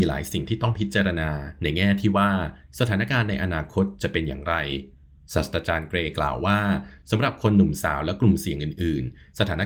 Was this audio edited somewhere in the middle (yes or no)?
no